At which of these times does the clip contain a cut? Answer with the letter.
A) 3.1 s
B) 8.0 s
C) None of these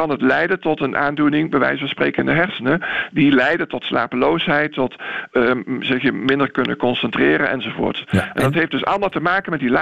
C